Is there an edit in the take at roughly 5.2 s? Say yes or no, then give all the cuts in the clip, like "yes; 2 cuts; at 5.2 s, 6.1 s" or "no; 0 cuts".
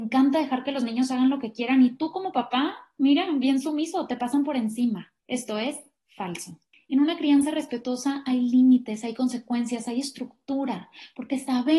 yes; 1 cut; at 5.2 s